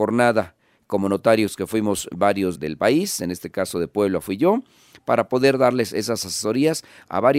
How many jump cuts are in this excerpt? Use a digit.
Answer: 1